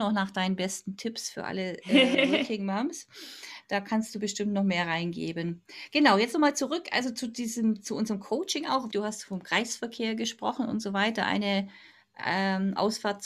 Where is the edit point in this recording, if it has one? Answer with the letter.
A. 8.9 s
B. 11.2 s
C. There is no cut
A